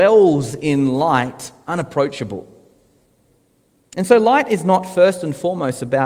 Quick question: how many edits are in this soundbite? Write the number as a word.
zero